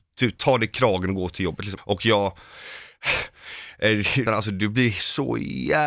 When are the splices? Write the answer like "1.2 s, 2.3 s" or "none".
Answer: 1.8 s, 4.3 s